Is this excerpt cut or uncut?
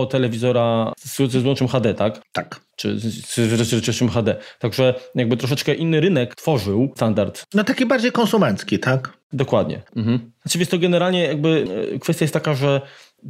cut